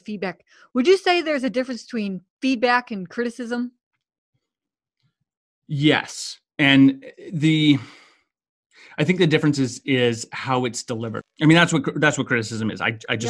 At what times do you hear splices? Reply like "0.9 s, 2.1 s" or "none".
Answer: 11.2 s